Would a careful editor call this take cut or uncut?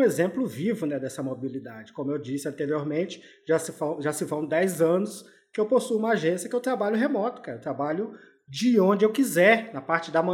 uncut